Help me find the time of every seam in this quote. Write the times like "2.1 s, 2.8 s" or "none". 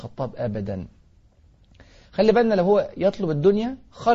none

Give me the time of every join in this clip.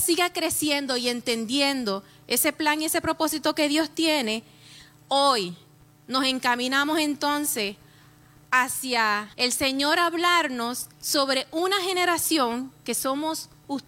9.3 s, 10.9 s

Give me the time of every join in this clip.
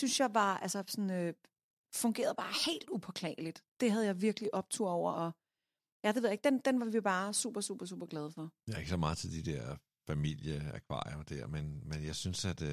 5.1 s, 8.6 s

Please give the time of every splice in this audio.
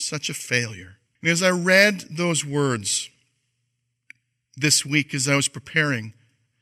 1.2 s

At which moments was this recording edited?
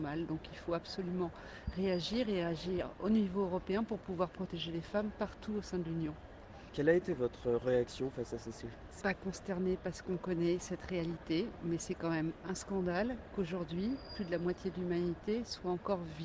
6.7 s, 9.0 s

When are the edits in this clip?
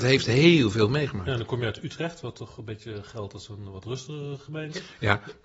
none

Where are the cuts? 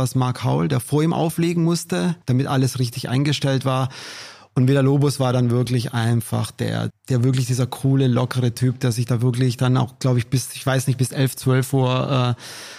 2.2 s, 6.9 s

